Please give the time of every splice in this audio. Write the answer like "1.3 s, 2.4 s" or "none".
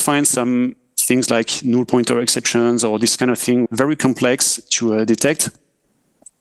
3.7 s

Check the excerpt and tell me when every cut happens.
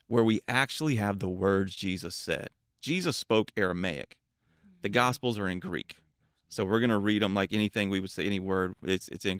none

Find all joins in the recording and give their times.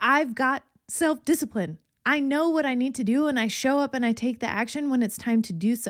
none

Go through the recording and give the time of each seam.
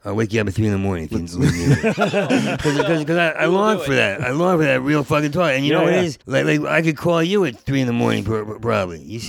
6.2 s

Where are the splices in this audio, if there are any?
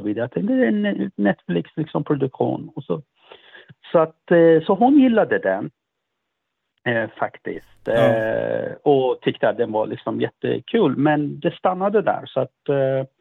none

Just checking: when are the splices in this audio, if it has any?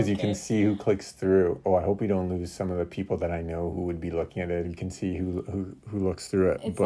1.6 s, 4.6 s

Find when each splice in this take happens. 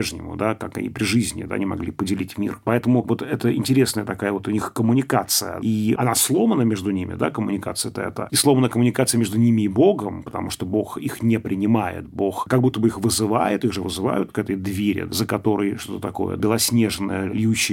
none

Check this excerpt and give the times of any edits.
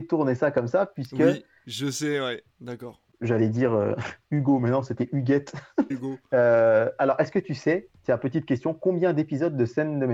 2.5 s, 5.9 s

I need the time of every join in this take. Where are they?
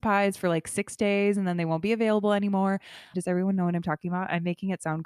3.1 s

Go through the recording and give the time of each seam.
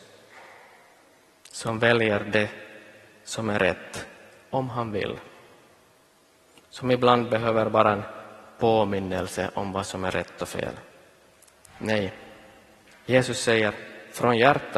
none

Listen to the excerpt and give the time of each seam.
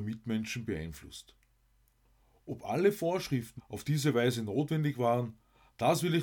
3.6 s

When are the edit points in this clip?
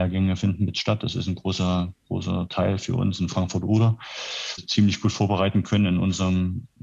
4.6 s

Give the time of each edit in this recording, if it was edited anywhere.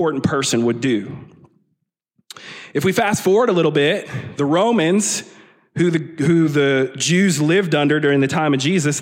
none

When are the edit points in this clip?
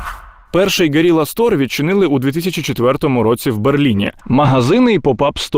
4.2 s

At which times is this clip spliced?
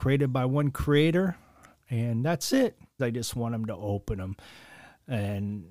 3.0 s

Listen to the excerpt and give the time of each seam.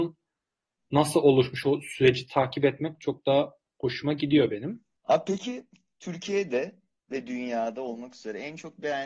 4.9 s

